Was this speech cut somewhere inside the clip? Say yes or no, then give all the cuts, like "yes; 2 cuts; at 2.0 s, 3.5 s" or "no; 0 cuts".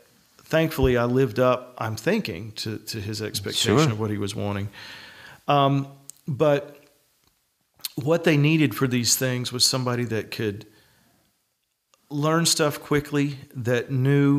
no; 0 cuts